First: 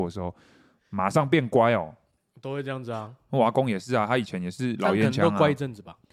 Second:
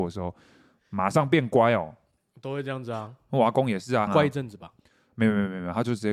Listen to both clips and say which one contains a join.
second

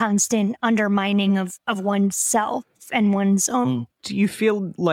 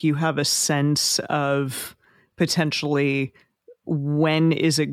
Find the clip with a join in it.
first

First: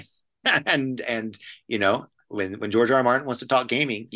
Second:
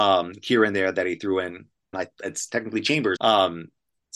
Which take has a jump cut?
second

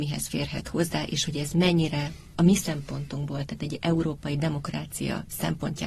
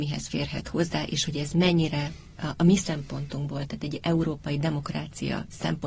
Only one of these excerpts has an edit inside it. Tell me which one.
first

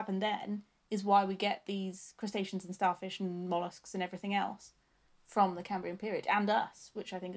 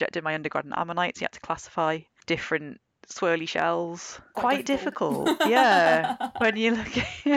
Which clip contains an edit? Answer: second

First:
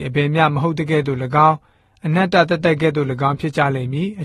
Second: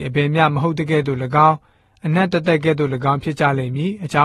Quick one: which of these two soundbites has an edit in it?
second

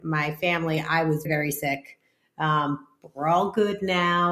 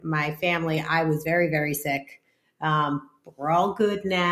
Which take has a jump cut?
first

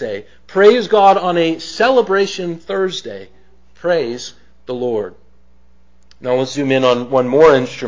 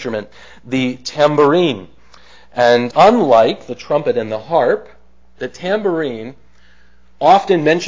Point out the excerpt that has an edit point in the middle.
second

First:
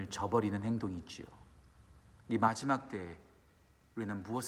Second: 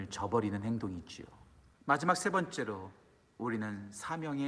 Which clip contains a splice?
second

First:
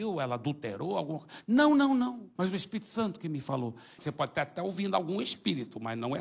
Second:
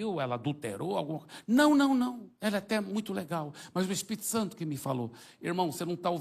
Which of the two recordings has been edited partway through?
first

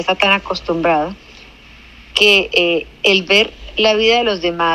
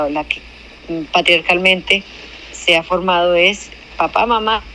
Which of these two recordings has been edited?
second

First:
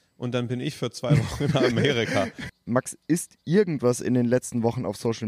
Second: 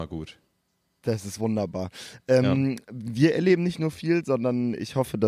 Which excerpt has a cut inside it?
first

